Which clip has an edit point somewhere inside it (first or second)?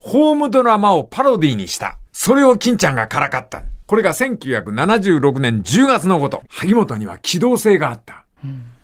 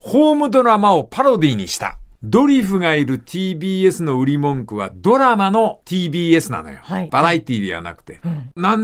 first